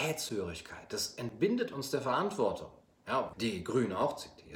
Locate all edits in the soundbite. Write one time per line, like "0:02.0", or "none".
0:03.3